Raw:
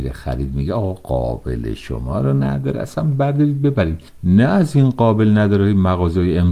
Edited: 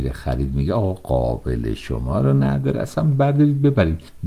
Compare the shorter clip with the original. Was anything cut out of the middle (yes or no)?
no